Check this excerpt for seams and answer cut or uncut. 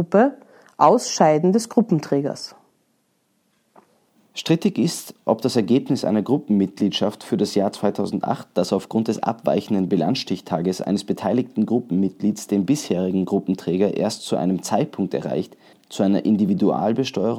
cut